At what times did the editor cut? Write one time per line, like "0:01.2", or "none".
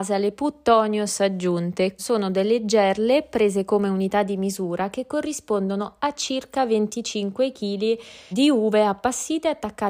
0:02.0
0:08.3